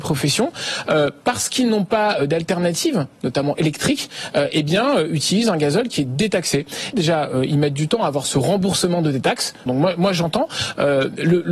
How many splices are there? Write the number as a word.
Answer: two